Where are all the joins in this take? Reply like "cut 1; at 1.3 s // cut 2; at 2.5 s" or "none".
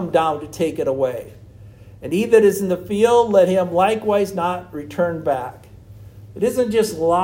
cut 1; at 6.3 s